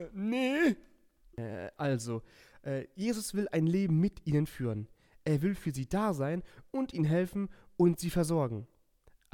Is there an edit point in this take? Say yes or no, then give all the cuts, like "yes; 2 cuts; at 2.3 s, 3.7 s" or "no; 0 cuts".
no; 0 cuts